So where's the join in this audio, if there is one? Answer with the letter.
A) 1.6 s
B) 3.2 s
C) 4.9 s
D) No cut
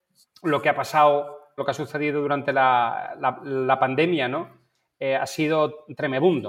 A